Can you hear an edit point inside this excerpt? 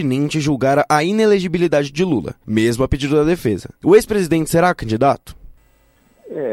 yes; 1 cut; at 3.8 s

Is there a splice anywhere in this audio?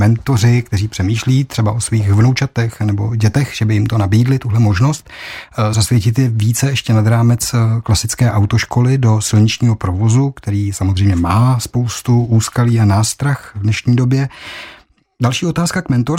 no; 0 cuts

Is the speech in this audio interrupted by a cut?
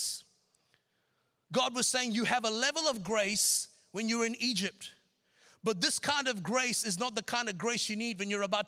no; 0 cuts

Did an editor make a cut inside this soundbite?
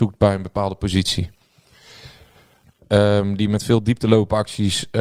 yes; 1 cut; at 2.8 s

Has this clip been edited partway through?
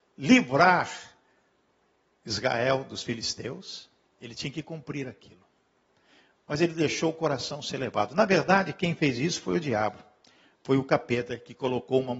no; 0 cuts

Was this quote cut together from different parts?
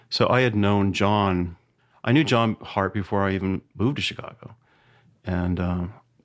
no; 0 cuts

